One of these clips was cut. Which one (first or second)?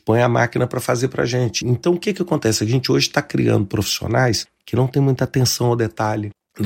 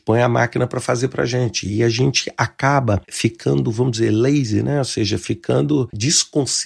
first